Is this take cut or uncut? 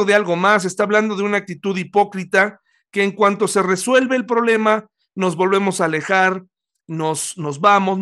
uncut